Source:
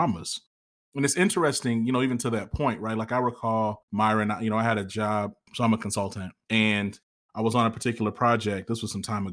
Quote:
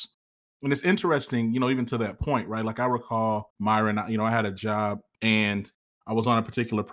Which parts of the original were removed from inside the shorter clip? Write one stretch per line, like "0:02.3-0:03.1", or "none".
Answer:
0:05.5-0:06.4